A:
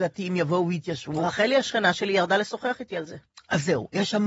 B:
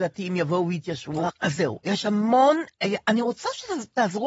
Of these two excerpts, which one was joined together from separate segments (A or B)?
B